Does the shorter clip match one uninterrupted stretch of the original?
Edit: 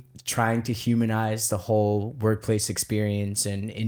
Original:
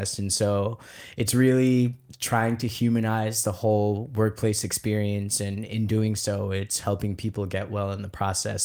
yes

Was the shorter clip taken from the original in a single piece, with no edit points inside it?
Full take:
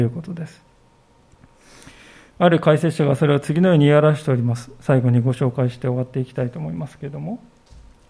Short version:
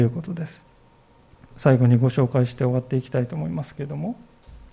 no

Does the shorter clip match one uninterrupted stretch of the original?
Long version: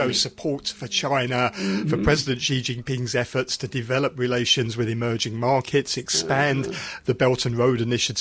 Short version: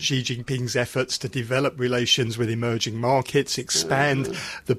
yes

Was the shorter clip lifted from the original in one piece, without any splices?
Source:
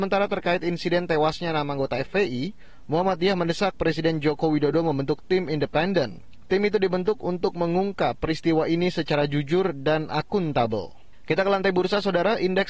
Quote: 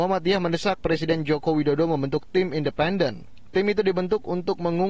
yes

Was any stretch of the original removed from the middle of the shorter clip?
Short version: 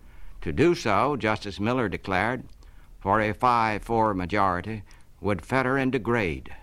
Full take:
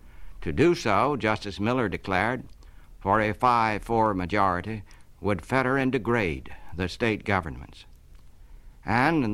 no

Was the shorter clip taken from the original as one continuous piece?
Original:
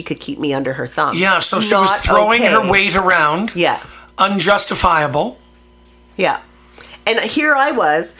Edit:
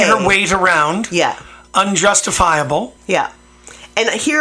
no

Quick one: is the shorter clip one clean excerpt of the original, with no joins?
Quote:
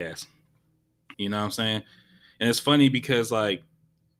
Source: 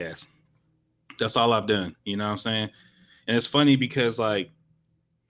no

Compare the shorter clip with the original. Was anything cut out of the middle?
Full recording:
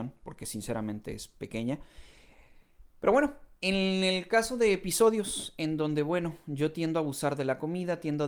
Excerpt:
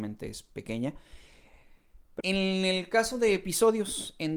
yes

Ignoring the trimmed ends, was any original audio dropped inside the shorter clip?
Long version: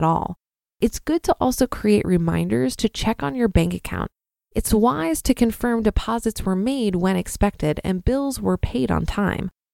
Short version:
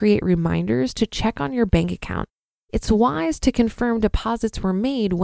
no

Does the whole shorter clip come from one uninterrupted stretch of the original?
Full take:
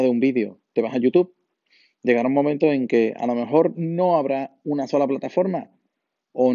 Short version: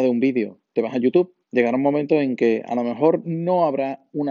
no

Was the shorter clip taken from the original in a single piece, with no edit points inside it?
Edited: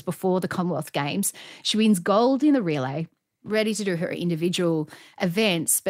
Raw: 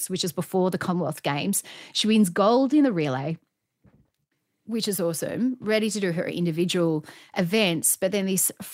no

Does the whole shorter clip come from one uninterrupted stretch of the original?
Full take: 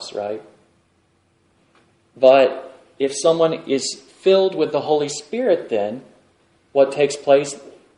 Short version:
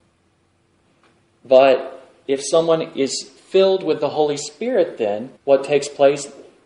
no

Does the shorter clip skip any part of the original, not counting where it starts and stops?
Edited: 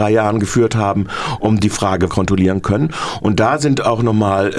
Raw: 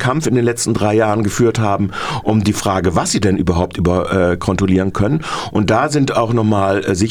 yes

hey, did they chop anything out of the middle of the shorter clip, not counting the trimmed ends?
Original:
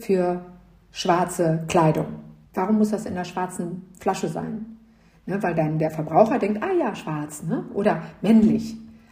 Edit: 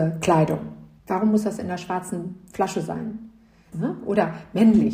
yes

